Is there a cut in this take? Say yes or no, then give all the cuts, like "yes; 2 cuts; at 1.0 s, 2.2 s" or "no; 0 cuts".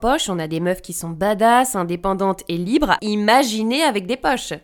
yes; 1 cut; at 3.0 s